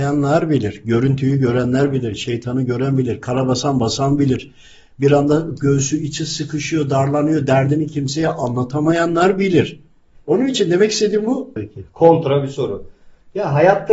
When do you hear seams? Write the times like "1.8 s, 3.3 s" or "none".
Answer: 10.1 s, 11.6 s